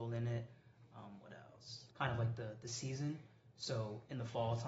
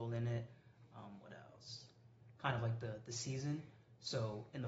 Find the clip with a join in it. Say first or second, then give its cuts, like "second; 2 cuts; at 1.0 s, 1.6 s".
first; 1 cut; at 1.9 s